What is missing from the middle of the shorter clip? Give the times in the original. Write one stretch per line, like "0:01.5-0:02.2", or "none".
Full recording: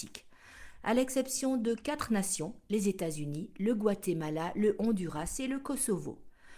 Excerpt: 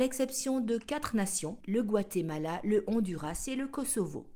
0:02.6-0:03.5